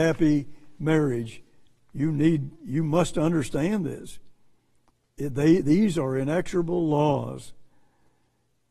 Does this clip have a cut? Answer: no; 0 cuts

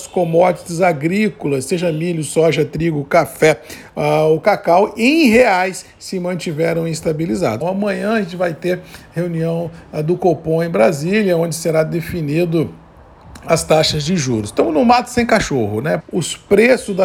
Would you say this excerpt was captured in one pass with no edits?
no; 2 cuts; at 7.6 s, 16.0 s

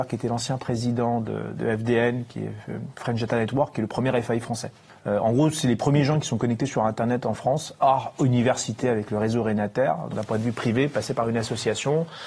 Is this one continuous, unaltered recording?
no; 2 cuts; at 1.5 s, 10.1 s

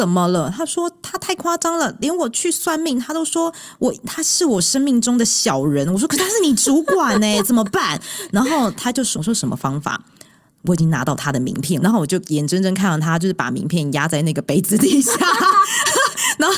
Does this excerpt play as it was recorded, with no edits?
no; 2 cuts; at 9.1 s, 11.8 s

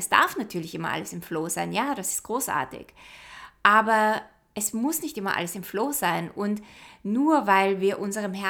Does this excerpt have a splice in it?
no; 0 cuts

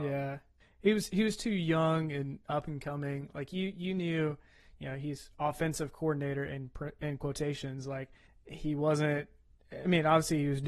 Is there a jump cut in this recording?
no; 0 cuts

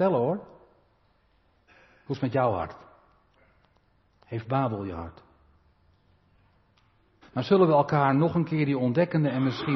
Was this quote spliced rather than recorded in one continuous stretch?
yes; 1 cut; at 7.2 s

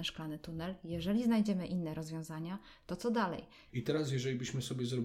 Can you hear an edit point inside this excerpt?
yes; 1 cut; at 3.7 s

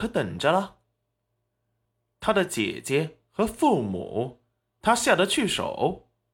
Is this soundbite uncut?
yes; 0 cuts

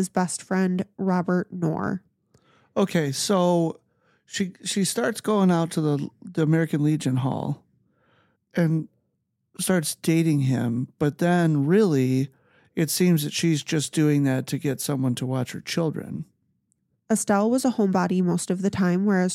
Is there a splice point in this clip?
yes; 2 cuts; at 8.4 s, 16.9 s

